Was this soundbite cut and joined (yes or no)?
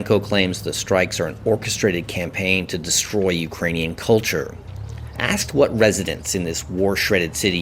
yes